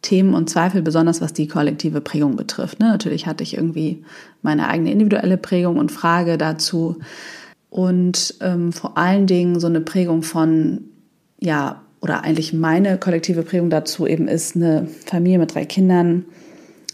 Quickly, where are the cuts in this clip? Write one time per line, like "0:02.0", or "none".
0:07.5